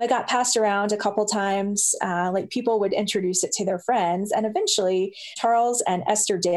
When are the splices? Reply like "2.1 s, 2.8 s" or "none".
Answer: none